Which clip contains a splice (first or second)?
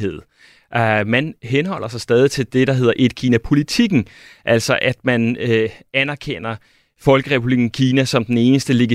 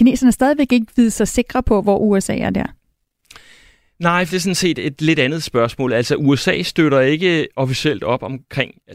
second